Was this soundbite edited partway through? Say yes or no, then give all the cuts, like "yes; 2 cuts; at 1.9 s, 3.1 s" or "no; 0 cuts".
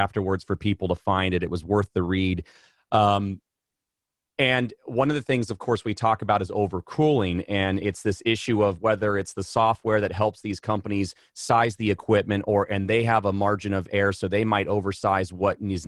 no; 0 cuts